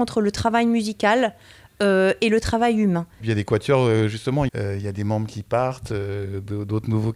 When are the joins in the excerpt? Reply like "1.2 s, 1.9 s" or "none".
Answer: 3.2 s, 4.5 s